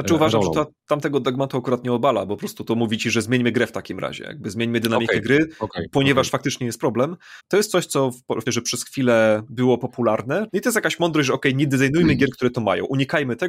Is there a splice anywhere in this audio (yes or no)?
yes